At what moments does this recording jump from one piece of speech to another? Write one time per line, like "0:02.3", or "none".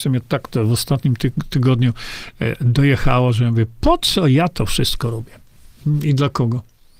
none